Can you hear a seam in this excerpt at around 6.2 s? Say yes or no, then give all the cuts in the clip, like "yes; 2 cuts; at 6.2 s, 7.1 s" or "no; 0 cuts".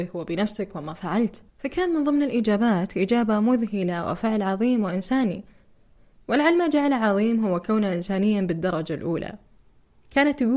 no; 1 cut; at 1.5 s